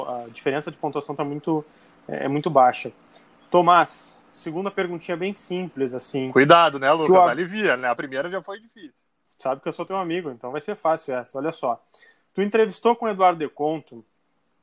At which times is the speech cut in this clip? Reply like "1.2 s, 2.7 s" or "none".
none